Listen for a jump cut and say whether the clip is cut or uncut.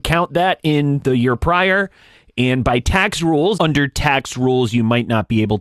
cut